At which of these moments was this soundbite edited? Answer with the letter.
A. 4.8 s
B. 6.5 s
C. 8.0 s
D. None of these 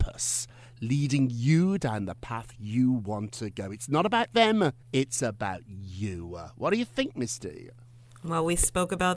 A